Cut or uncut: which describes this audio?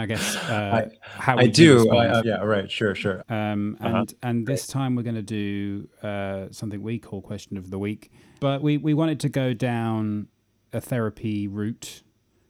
cut